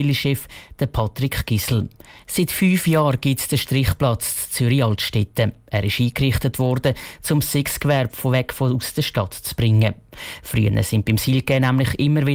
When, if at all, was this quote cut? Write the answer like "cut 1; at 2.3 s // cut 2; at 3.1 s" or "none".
cut 1; at 2.2 s